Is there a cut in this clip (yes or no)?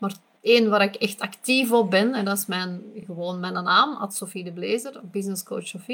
no